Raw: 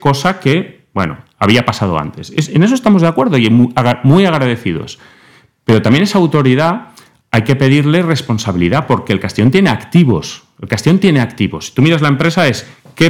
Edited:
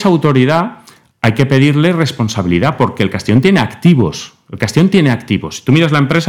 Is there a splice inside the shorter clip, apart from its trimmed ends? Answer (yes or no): no